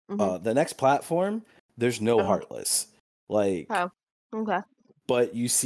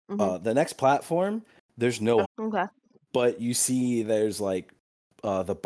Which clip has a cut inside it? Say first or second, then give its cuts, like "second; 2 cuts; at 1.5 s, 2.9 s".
second; 1 cut; at 2.2 s